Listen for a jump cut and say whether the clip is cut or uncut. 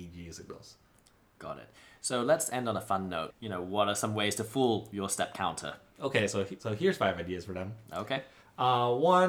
cut